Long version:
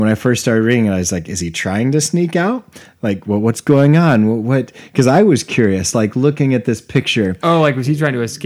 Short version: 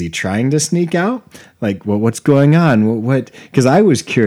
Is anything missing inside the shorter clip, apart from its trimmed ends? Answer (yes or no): no